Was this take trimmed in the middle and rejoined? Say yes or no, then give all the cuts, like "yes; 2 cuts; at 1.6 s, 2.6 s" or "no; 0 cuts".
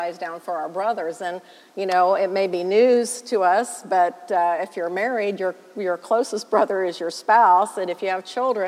no; 0 cuts